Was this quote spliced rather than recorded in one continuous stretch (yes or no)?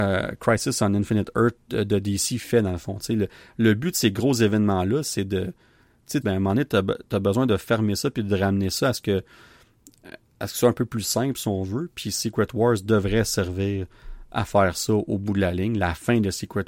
yes